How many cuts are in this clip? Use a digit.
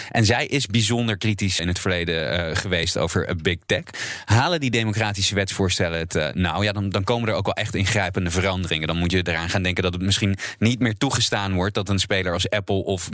1